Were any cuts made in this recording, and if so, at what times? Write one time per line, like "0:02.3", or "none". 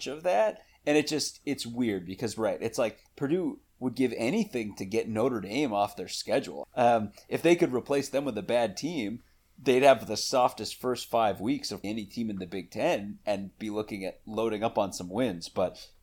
0:06.6
0:11.8